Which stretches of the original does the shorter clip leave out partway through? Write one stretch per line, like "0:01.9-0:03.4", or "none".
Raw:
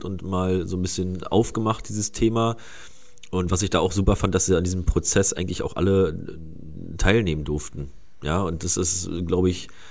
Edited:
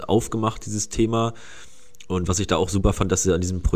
none